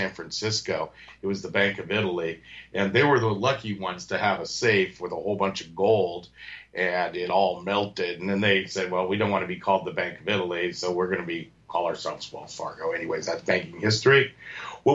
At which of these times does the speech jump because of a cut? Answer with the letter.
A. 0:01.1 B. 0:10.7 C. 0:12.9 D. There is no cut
D